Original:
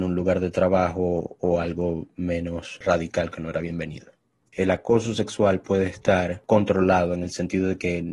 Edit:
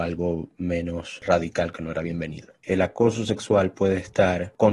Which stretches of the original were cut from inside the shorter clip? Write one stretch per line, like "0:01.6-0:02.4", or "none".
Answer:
0:04.2-0:04.5